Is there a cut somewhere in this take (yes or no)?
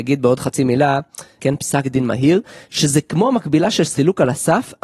yes